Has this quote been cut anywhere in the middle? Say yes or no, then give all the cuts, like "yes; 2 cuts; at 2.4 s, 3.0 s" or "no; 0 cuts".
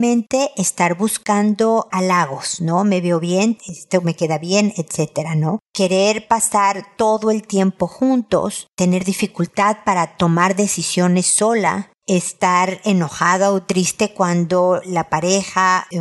yes; 1 cut; at 3.6 s